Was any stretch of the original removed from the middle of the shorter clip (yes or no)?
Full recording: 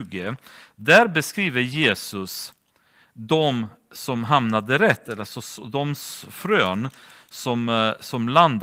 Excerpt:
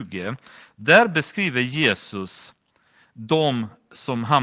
no